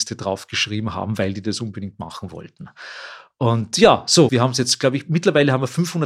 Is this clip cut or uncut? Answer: cut